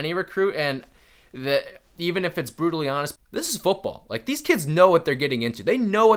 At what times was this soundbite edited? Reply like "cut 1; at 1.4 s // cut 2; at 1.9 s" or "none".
cut 1; at 3.2 s